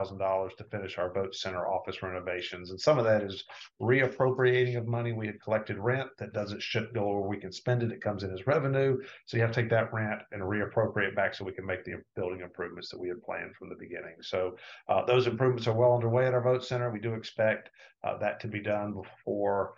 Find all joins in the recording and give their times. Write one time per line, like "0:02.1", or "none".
none